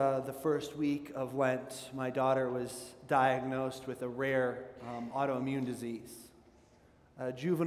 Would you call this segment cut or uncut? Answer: uncut